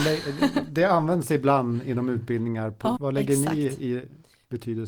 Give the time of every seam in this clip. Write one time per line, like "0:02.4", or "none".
0:03.0